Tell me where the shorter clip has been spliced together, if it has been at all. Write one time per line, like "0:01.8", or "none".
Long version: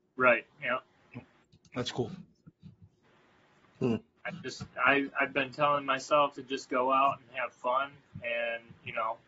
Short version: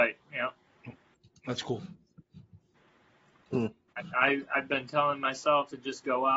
0:04.1